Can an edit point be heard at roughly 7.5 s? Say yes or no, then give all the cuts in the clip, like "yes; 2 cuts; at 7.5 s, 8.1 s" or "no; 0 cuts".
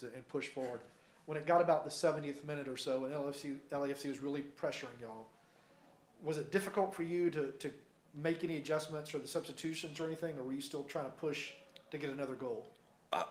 no; 0 cuts